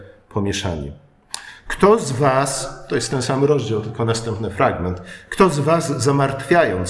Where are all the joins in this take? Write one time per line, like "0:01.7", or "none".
0:01.7